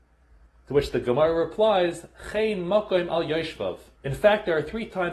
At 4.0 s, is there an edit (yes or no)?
yes